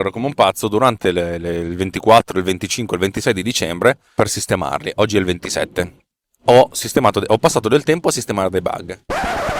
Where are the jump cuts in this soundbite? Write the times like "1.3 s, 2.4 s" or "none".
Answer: none